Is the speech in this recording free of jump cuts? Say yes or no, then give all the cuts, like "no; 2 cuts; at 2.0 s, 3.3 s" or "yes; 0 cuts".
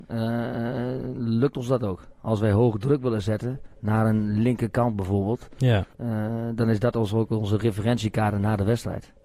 no; 1 cut; at 5.9 s